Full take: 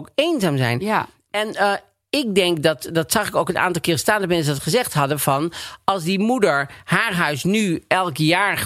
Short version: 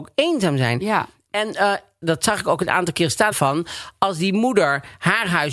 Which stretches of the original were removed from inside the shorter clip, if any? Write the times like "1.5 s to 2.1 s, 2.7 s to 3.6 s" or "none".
2.0 s to 2.9 s, 4.2 s to 5.2 s